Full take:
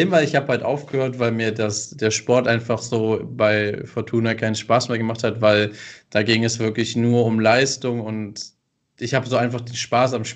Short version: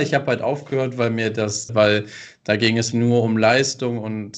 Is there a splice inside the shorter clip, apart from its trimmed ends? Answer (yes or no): yes